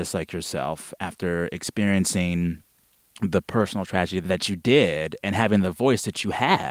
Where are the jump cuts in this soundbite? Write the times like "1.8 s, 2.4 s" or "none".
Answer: none